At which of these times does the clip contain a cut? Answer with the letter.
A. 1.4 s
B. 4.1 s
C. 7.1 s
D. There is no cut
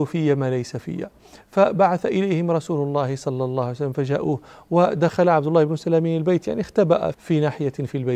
C